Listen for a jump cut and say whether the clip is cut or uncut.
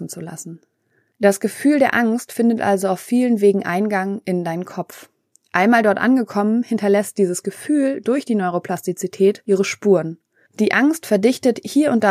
uncut